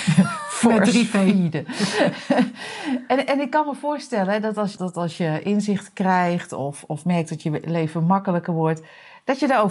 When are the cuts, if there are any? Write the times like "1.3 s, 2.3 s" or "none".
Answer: 4.8 s